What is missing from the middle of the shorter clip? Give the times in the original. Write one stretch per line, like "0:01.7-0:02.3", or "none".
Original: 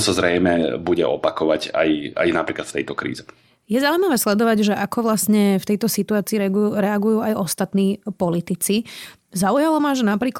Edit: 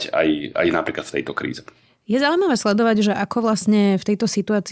none